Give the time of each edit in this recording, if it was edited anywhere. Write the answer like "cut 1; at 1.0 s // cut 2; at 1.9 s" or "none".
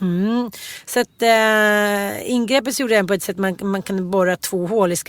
none